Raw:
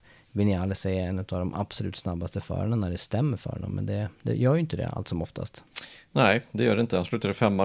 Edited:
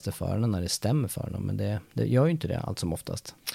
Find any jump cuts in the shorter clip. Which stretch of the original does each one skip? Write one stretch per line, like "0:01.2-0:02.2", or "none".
none